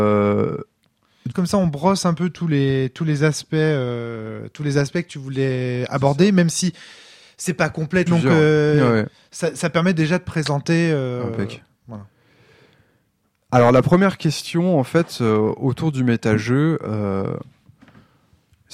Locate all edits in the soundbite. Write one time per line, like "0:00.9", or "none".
0:01.3
0:08.1